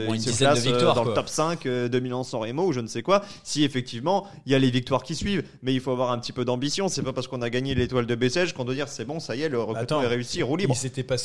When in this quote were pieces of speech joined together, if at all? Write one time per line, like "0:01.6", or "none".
none